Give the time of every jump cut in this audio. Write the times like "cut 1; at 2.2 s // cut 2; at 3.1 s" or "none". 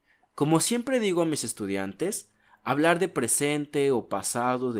none